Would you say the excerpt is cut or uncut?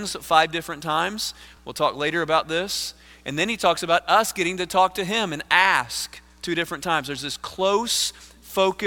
uncut